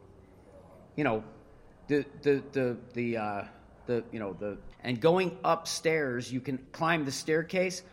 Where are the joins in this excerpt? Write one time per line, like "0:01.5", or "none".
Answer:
0:04.7
0:06.7